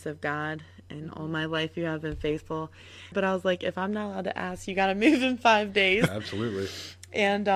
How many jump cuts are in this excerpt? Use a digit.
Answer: 2